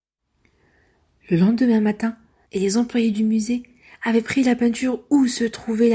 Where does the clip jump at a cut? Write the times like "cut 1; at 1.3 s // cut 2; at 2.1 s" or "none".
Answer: cut 1; at 2.4 s